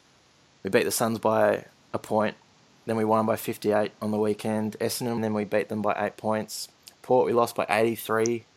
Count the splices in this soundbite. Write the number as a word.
one